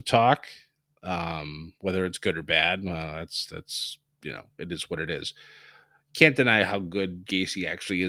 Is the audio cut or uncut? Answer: uncut